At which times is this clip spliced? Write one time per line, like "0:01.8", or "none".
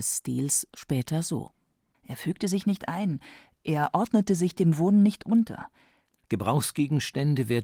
0:01.9
0:06.2